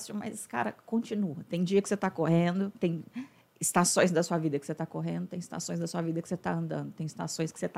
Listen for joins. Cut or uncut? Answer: cut